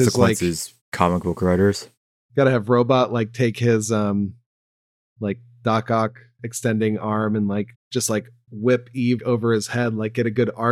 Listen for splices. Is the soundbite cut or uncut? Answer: cut